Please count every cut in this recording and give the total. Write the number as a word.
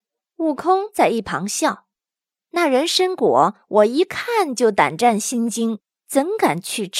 one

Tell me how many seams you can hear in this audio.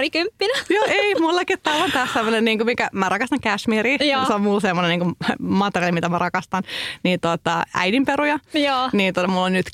zero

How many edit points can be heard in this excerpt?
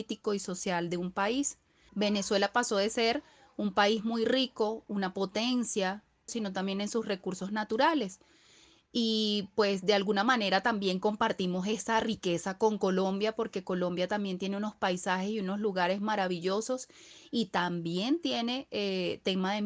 two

